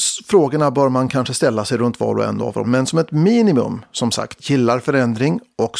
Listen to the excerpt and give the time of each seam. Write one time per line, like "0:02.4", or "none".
0:02.6
0:04.4